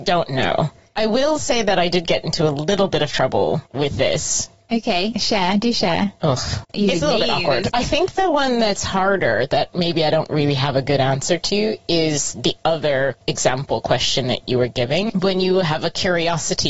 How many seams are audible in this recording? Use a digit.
1